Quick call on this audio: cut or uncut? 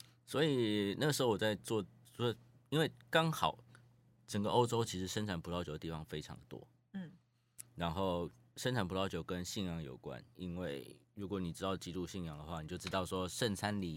uncut